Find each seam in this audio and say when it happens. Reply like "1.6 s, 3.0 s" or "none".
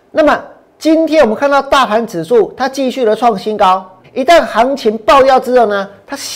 4.0 s

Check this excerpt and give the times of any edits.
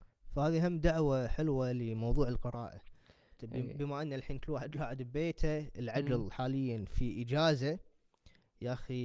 none

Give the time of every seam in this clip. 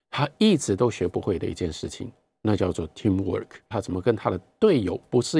3.7 s

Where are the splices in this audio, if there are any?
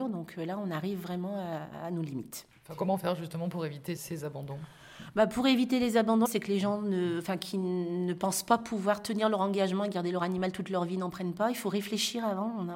4.0 s, 6.3 s

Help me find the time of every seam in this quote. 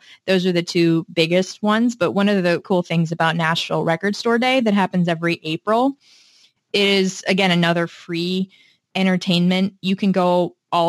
2.6 s

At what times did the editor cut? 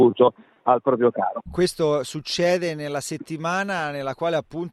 1.4 s

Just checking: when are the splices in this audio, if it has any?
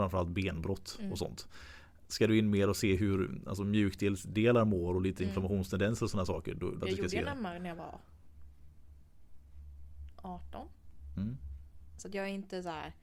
6.8 s, 12.0 s

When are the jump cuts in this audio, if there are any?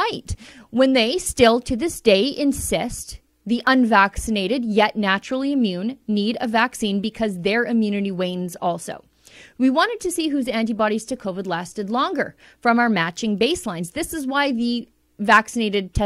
none

